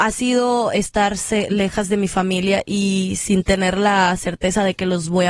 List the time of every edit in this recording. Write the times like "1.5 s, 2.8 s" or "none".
none